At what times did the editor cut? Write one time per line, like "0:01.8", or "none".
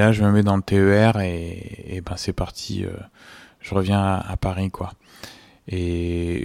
none